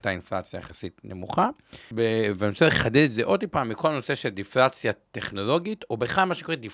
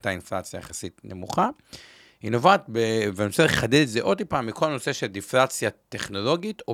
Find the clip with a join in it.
first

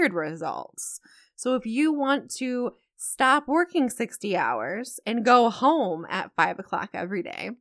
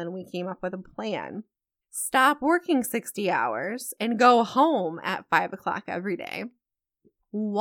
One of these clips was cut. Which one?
second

